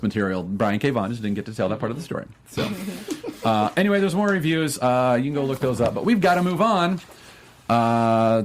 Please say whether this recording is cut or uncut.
uncut